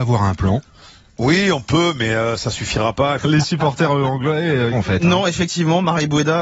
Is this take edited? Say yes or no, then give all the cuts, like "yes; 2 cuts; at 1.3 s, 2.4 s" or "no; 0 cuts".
yes; 2 cuts; at 3.2 s, 4.7 s